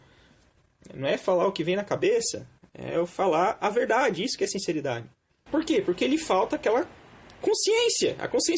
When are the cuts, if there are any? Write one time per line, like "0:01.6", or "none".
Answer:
0:05.5

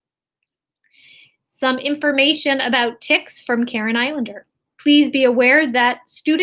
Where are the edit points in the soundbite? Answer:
0:04.7

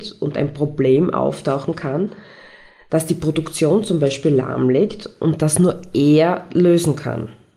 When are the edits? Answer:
none

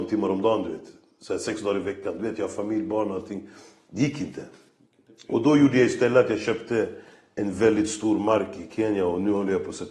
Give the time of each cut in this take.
none

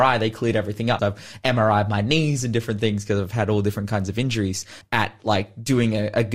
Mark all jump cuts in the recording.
0:01.0
0:04.8

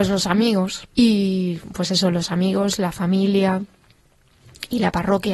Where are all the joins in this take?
0:00.9

